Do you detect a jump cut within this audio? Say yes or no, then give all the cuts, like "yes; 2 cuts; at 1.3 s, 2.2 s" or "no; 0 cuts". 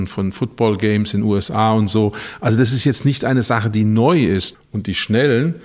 yes; 1 cut; at 4.5 s